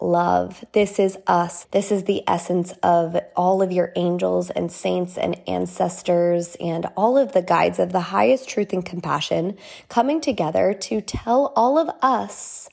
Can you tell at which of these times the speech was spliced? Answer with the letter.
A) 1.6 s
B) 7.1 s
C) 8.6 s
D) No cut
A